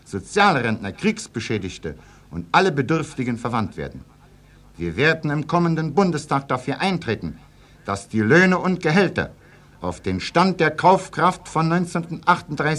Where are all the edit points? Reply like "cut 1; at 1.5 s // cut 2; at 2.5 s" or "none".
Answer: none